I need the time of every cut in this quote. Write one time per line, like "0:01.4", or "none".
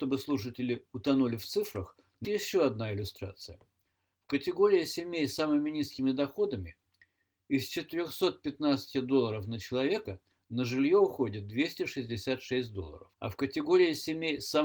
0:02.2
0:13.1